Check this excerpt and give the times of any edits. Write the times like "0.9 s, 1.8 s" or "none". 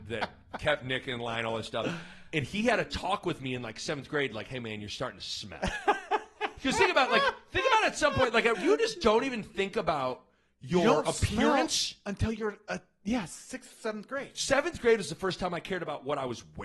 8.5 s